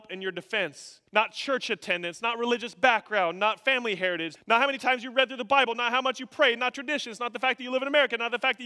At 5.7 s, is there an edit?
no; 2 cuts; at 1.1 s, 4.3 s

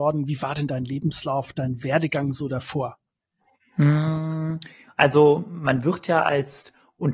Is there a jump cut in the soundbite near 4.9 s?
no; 0 cuts

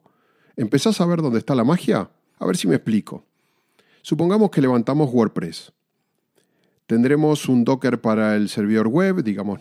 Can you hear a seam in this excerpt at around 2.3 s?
yes; 1 cut; at 2.3 s

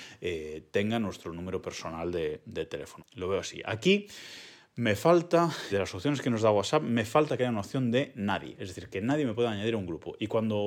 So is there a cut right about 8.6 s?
no; 2 cuts; at 3.0 s, 5.7 s

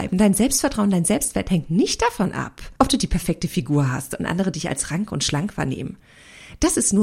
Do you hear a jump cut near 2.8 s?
yes; 1 cut; at 2.8 s

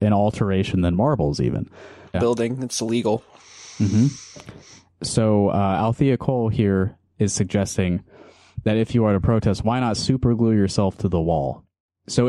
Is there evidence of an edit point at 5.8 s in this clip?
no; 1 cut; at 2.1 s

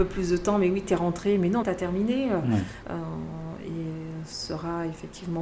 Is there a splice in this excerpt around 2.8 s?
yes; 2 cuts; at 1.6 s, 2.8 s

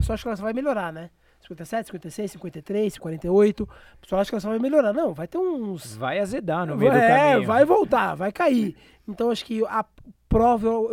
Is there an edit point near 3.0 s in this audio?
yes; 1 cut; at 3.0 s

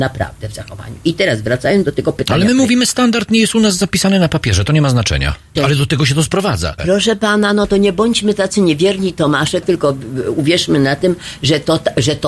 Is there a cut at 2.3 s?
no; 3 cuts; at 5.6 s, 6.8 s, 9.6 s

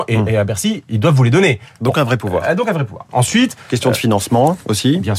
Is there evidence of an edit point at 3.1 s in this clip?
yes; 1 cut; at 3.1 s

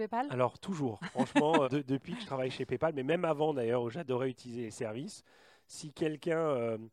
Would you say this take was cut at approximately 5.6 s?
no; 1 cut; at 1.6 s

